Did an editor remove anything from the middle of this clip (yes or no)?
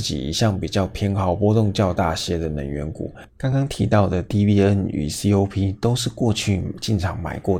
no